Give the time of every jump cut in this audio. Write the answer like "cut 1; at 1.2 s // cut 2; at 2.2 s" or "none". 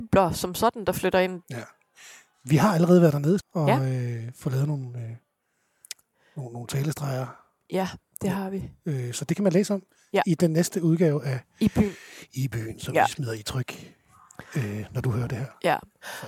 cut 1; at 1.4 s // cut 2; at 3.4 s